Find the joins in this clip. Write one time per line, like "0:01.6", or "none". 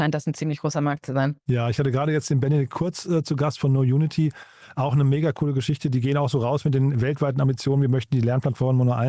none